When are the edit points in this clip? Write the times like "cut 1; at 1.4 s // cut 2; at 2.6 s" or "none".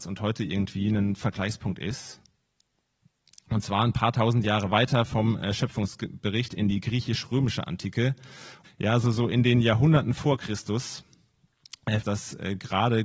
cut 1; at 8.6 s // cut 2; at 12.0 s